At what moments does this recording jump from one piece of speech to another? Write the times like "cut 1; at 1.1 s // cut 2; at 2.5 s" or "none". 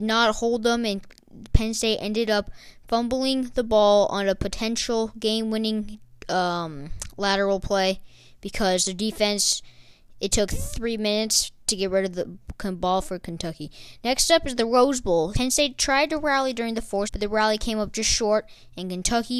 cut 1; at 15.3 s // cut 2; at 17.1 s

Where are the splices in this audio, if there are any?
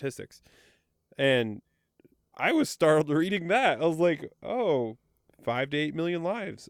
none

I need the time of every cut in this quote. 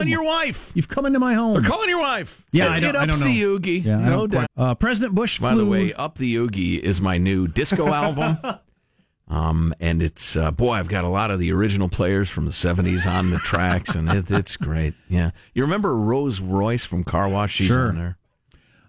cut 1; at 2.5 s // cut 2; at 4.4 s

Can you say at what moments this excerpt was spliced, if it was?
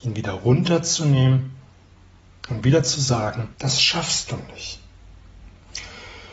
cut 1; at 3.5 s

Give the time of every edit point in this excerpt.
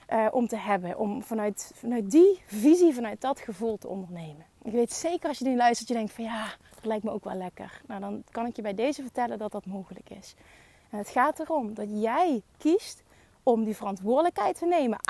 cut 1; at 4.5 s

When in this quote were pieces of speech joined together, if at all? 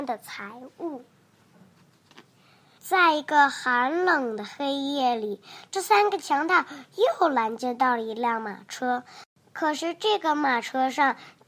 cut 1; at 2.8 s

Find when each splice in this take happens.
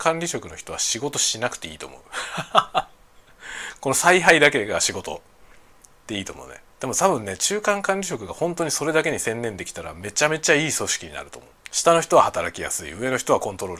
cut 1; at 11.6 s

